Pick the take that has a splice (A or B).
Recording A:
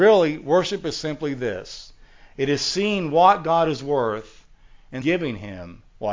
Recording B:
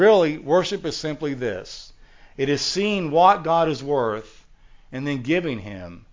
A